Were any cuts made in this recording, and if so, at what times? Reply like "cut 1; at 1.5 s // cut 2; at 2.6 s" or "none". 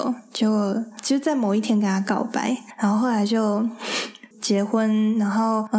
cut 1; at 4.3 s